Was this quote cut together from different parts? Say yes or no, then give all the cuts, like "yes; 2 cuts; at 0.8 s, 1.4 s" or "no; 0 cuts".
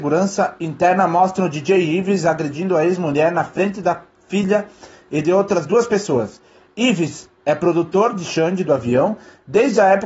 no; 0 cuts